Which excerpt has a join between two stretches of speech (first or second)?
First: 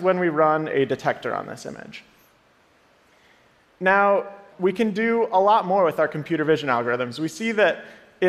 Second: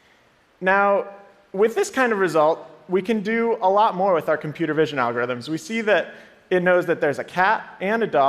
first